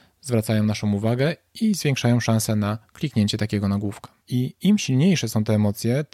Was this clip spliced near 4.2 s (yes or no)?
yes